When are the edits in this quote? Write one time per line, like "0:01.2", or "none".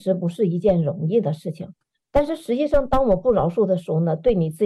0:01.8